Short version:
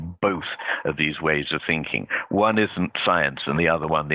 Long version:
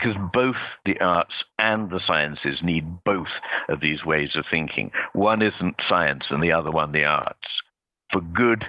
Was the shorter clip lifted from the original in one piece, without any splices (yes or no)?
yes